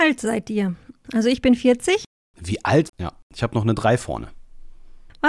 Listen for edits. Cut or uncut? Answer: cut